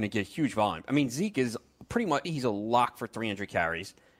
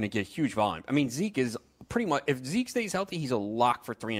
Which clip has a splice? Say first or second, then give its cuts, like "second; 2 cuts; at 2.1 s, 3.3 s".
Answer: first; 1 cut; at 2.2 s